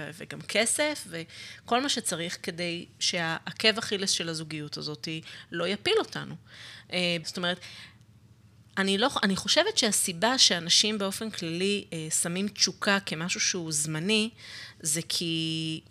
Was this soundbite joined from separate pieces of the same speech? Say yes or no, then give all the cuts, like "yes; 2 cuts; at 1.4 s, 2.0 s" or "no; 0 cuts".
yes; 1 cut; at 7.2 s